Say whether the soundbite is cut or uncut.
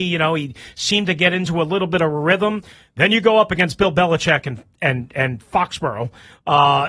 uncut